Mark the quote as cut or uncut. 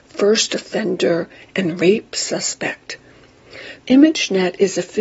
cut